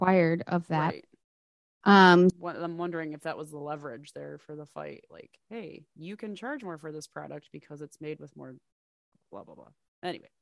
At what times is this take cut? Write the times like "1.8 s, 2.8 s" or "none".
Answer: 2.3 s